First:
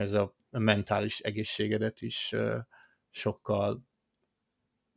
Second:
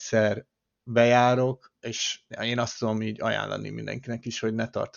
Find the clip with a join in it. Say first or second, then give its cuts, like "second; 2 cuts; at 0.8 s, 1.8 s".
second; 1 cut; at 2.3 s